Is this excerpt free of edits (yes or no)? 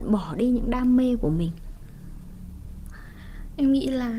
yes